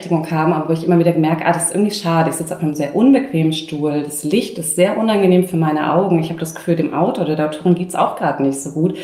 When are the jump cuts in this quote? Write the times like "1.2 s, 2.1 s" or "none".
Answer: none